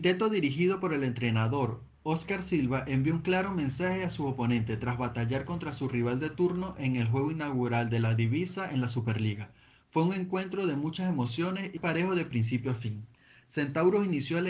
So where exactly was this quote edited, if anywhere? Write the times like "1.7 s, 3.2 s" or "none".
11.8 s